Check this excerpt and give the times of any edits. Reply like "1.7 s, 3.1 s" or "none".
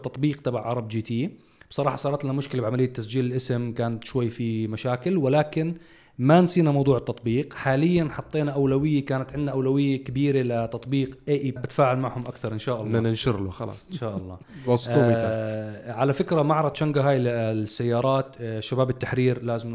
11.6 s